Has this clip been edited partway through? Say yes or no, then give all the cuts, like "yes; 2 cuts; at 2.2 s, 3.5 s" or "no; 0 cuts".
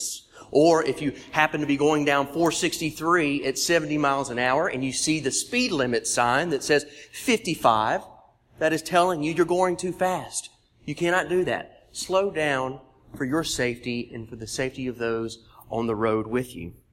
no; 0 cuts